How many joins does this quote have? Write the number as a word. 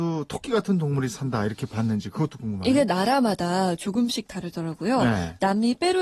zero